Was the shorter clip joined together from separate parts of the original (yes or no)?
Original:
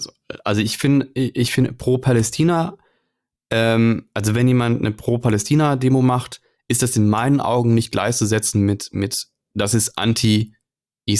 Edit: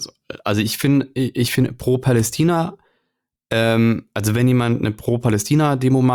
no